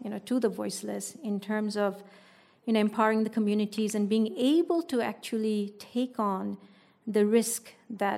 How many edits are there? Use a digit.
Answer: 0